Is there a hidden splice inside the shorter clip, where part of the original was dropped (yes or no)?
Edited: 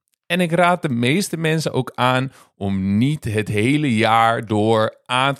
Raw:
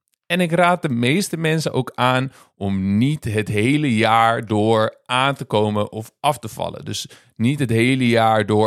no